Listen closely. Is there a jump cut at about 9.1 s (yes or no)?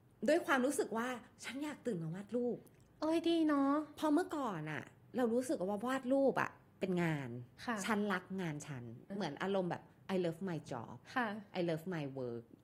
yes